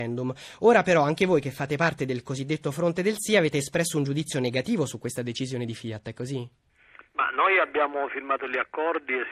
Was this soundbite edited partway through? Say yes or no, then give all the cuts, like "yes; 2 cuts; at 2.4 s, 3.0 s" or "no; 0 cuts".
no; 0 cuts